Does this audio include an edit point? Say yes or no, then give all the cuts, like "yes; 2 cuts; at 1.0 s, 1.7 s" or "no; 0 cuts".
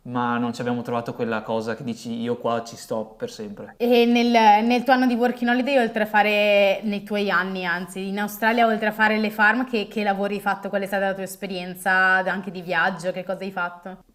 no; 0 cuts